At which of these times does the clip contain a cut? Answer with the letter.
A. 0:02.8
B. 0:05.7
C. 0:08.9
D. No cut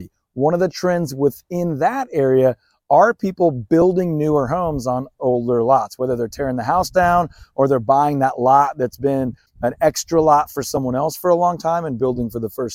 D